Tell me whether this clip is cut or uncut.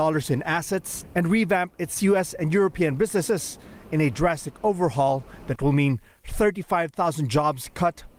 cut